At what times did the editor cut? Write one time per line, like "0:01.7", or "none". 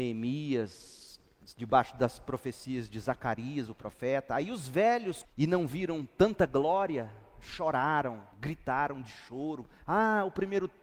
0:05.2
0:08.3